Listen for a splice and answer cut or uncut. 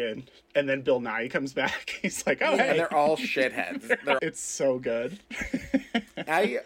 cut